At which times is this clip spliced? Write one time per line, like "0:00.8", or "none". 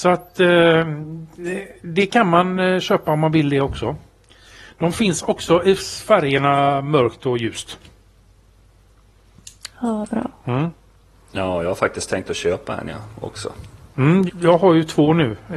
0:14.3